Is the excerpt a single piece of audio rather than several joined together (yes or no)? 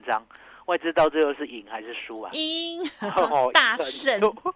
yes